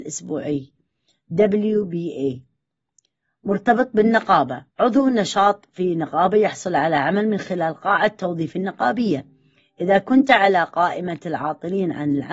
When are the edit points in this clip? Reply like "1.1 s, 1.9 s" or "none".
4.7 s